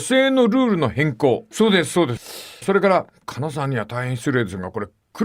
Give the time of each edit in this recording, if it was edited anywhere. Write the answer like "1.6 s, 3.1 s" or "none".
1.5 s